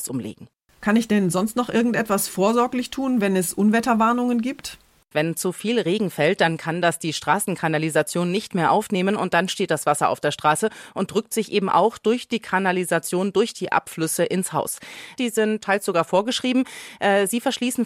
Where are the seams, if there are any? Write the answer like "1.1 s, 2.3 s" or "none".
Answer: 5.1 s, 15.2 s